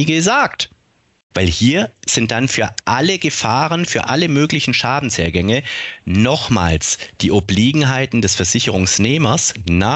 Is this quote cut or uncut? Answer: cut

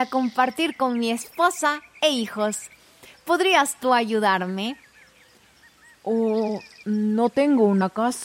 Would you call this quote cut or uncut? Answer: cut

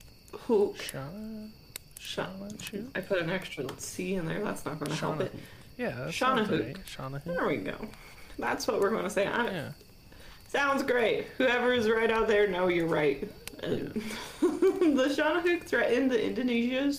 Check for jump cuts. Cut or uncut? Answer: cut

